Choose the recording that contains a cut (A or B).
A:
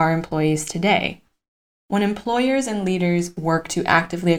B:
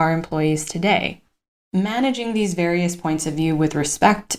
B